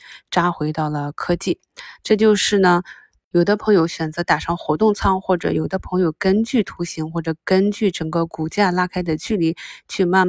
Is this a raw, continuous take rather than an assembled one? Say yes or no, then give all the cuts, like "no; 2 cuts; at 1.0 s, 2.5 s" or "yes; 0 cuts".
no; 1 cut; at 2.0 s